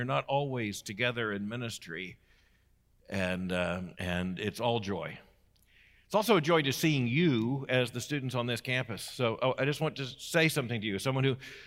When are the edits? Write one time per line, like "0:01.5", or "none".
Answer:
0:03.9